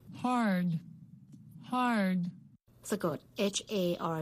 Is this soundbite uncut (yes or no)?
yes